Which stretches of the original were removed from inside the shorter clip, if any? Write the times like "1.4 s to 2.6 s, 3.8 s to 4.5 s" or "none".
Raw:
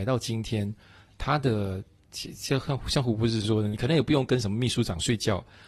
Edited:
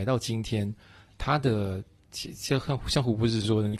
none